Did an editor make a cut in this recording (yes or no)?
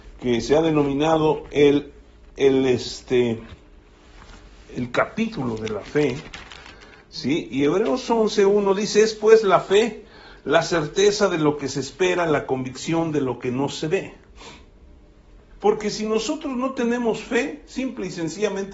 yes